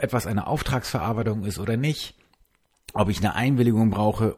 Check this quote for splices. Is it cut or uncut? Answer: uncut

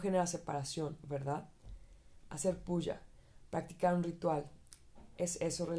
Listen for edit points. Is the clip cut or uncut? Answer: cut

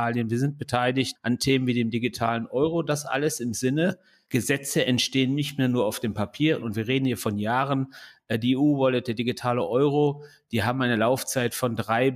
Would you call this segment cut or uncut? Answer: cut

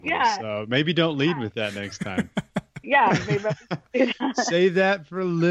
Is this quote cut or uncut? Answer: cut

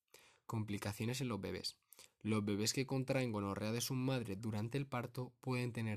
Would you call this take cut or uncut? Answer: uncut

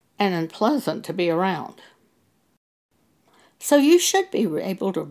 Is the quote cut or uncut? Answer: uncut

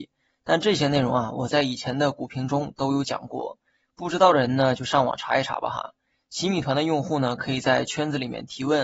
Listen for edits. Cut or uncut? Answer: uncut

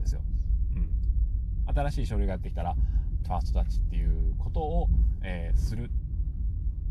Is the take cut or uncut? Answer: cut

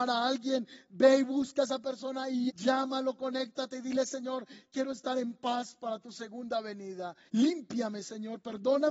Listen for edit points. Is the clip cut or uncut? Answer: cut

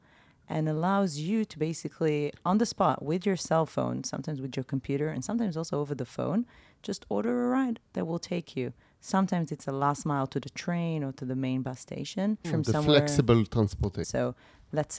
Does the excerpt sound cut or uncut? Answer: cut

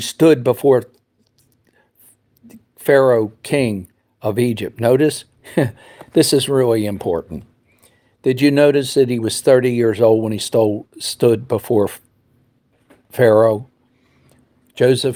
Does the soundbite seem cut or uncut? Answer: uncut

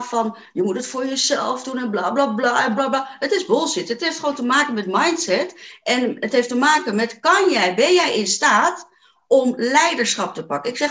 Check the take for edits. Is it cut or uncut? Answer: cut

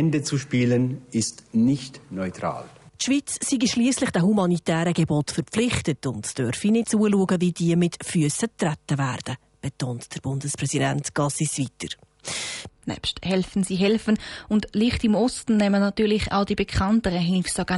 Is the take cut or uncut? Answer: cut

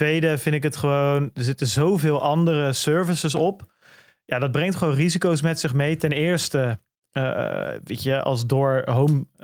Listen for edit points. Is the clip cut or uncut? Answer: uncut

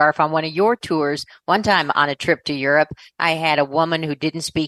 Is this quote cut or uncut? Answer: uncut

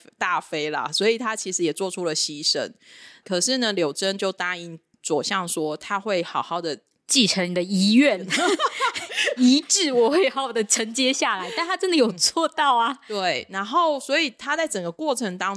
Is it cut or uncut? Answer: uncut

